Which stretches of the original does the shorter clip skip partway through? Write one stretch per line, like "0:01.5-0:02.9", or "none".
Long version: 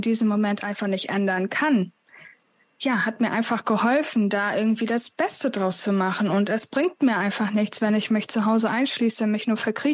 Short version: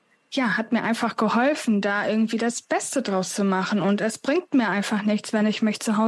none